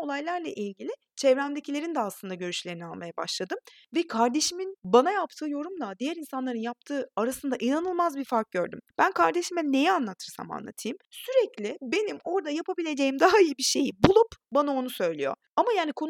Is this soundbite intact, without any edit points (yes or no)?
yes